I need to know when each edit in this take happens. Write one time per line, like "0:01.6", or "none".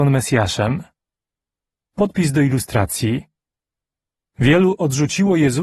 0:01.8